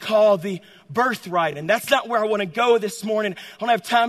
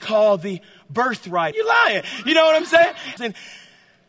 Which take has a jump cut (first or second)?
second